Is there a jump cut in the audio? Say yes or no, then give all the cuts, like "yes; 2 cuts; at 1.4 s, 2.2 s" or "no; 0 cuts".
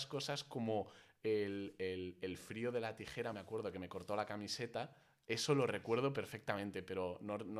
no; 0 cuts